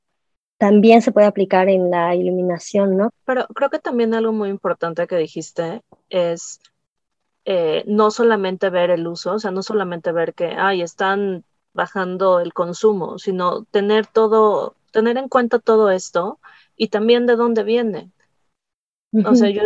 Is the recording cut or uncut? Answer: cut